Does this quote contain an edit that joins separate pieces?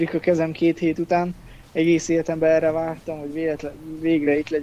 no; 0 cuts

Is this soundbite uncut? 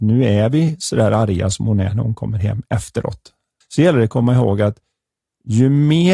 no; 1 cut; at 3.6 s

